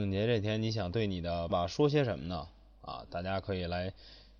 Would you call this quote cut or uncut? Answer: cut